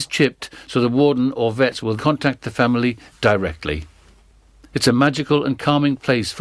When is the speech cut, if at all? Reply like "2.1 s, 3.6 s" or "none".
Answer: 2.0 s, 4.7 s